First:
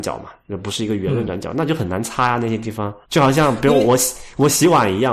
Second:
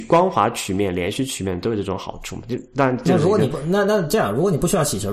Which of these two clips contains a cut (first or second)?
first